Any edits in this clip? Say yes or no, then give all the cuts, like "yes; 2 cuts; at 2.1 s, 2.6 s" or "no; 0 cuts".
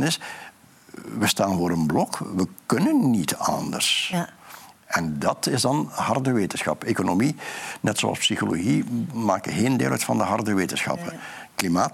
no; 0 cuts